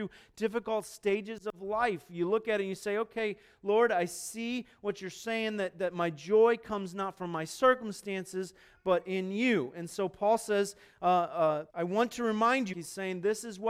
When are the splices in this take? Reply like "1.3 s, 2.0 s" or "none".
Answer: 11.7 s, 12.7 s